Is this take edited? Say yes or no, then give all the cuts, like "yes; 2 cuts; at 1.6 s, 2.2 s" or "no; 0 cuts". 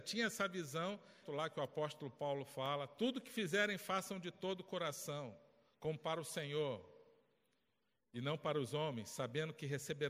yes; 1 cut; at 1.2 s